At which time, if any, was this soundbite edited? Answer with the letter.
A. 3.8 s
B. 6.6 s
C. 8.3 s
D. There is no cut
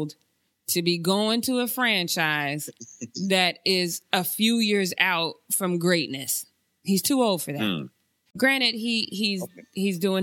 C